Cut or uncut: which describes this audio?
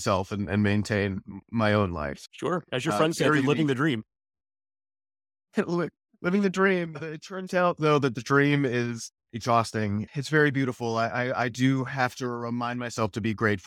uncut